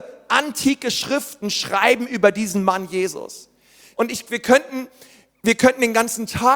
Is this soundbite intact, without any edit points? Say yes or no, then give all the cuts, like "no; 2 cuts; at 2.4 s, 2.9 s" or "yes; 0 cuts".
no; 1 cut; at 3.9 s